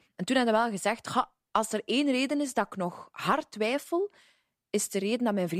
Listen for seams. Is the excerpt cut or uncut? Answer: uncut